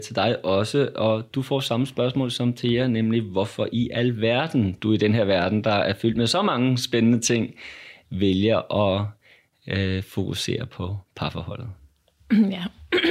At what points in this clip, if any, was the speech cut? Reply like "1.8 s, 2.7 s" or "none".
none